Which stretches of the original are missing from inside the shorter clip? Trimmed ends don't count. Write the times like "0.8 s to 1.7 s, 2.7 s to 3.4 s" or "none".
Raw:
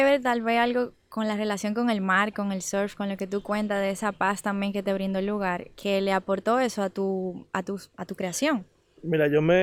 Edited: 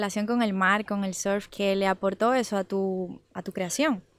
3.0 s to 5.7 s, 7.5 s to 7.9 s